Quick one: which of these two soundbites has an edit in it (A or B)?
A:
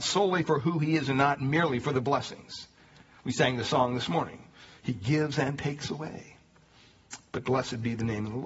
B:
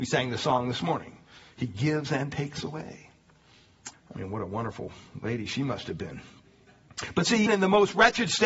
B